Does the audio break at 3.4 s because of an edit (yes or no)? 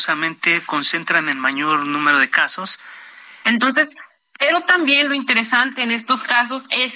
yes